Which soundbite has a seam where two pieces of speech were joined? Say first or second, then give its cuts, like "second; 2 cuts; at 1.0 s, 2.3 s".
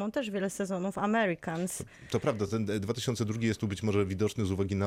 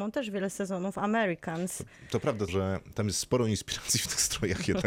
second; 1 cut; at 2.5 s